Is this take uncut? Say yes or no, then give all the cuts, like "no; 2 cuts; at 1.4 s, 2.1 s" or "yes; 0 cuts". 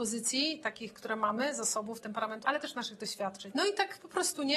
no; 2 cuts; at 2.4 s, 3.5 s